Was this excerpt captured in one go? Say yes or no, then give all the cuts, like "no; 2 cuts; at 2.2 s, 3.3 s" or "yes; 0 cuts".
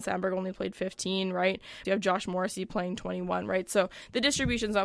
no; 1 cut; at 1.8 s